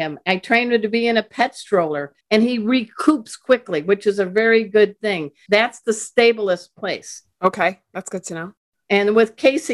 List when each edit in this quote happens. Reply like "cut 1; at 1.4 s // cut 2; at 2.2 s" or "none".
cut 1; at 2.2 s // cut 2; at 5.5 s